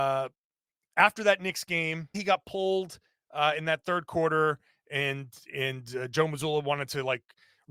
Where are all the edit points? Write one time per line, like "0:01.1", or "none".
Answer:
0:02.1